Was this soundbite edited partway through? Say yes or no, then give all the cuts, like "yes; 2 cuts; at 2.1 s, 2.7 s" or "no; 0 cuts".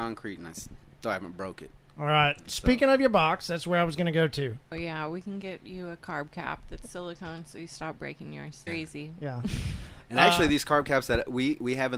yes; 2 cuts; at 4.7 s, 8.7 s